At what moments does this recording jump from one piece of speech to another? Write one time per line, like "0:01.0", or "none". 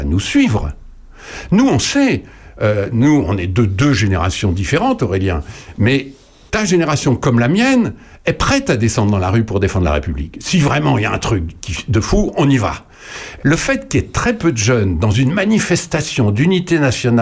0:06.5
0:13.4